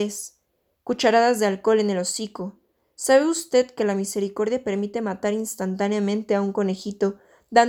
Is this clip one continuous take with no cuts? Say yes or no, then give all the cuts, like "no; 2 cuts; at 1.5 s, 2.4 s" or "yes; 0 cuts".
yes; 0 cuts